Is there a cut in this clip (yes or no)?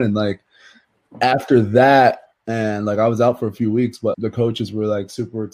yes